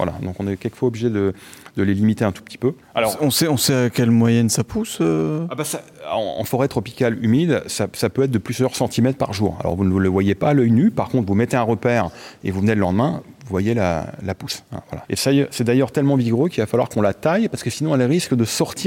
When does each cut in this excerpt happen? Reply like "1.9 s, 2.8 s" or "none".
15.0 s